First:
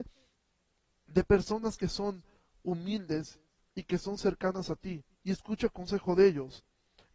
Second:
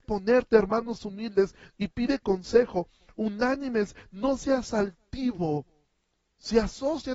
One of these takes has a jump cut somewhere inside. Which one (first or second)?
first